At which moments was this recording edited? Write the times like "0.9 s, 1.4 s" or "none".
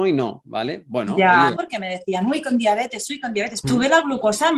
1.6 s, 3.6 s